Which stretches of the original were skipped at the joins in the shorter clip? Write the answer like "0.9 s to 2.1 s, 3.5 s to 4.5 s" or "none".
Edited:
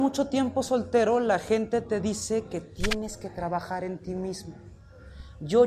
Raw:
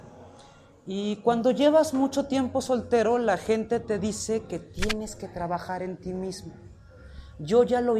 none